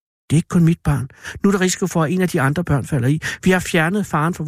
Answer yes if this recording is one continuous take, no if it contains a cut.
yes